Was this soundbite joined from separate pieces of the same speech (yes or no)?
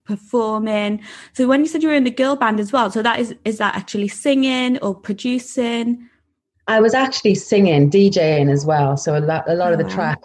no